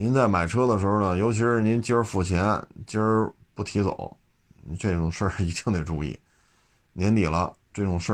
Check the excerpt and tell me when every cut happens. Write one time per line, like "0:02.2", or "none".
none